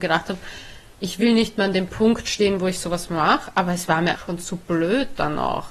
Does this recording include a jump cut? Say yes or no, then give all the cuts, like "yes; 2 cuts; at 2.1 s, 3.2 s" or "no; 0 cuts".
yes; 1 cut; at 4.1 s